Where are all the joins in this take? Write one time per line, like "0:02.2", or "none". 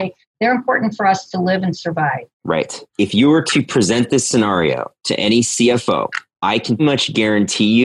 0:02.9
0:06.8